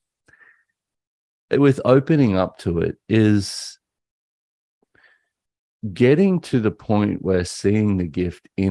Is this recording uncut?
yes; 0 cuts

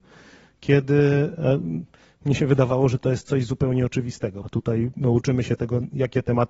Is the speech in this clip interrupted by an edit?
yes; 1 cut; at 4.4 s

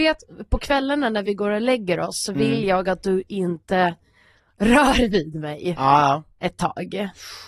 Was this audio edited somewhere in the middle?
no; 0 cuts

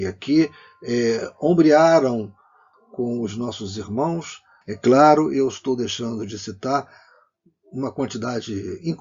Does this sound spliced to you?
yes; 2 cuts; at 2.7 s, 4.6 s

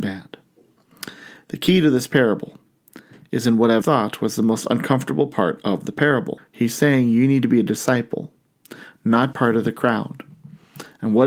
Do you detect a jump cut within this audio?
yes; 3 cuts; at 3.8 s, 6.4 s, 9.3 s

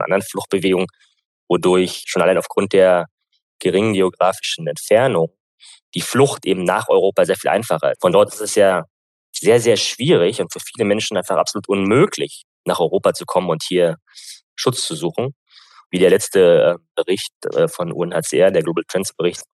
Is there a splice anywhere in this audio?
yes; 1 cut; at 7.9 s

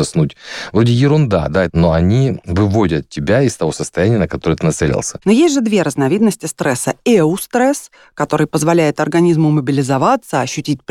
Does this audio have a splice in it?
yes; 2 cuts; at 1.7 s, 5.2 s

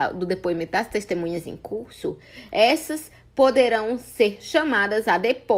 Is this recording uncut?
yes; 0 cuts

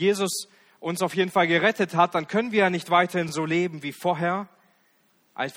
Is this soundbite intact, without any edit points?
yes; 0 cuts

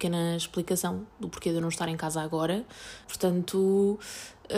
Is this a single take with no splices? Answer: no; 1 cut; at 3.0 s

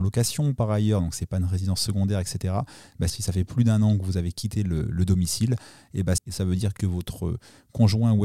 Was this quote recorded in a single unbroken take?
no; 2 cuts; at 3.1 s, 6.2 s

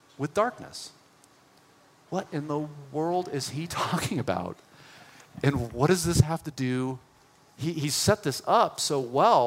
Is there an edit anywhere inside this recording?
no; 0 cuts

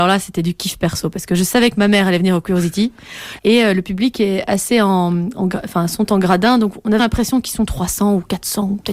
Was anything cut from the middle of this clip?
yes; 2 cuts; at 3.4 s, 7.0 s

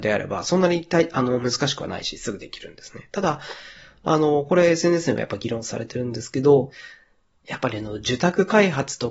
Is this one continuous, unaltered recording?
yes; 0 cuts

